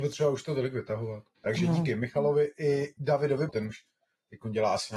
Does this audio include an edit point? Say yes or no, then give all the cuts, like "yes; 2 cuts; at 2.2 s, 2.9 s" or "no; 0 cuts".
yes; 2 cuts; at 1.3 s, 3.5 s